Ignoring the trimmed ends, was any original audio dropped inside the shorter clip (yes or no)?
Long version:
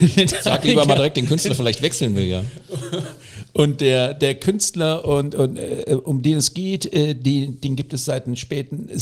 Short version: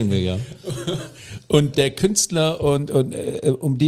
yes